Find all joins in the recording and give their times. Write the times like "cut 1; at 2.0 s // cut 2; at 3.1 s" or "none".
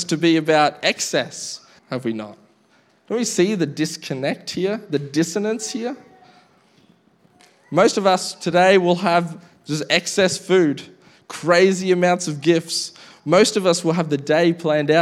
cut 1; at 1.8 s